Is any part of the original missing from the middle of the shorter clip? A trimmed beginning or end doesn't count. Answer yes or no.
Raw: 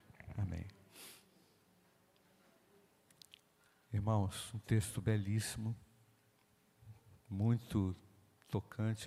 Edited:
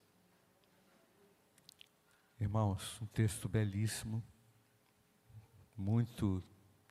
no